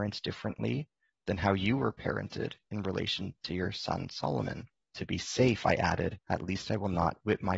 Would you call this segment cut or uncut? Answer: cut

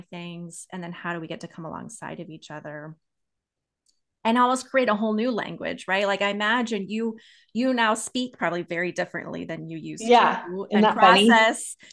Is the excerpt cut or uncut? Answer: uncut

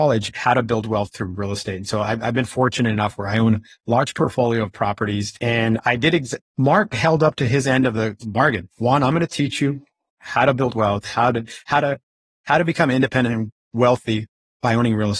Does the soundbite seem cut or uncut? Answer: uncut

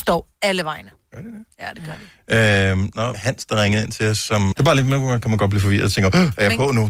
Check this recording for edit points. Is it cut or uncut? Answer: cut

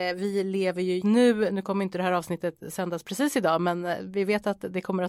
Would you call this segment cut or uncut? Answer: cut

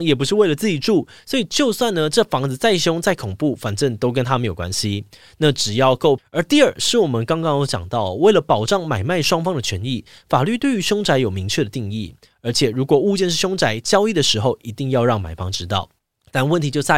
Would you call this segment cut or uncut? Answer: cut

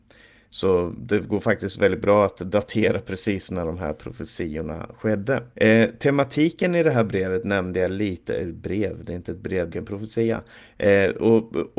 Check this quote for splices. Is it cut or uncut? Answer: cut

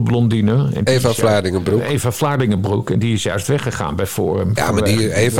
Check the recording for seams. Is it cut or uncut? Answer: uncut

